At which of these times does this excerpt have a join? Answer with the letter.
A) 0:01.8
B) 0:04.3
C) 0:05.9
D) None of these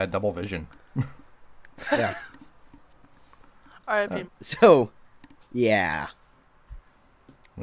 B